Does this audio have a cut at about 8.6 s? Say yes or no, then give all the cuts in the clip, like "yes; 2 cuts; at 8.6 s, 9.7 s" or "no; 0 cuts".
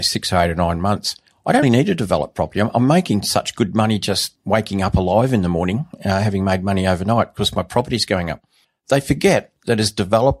no; 1 cut; at 1.6 s